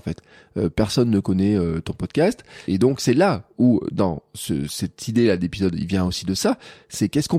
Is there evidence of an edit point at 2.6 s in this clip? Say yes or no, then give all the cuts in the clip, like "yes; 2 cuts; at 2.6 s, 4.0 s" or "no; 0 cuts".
yes; 1 cut; at 2.6 s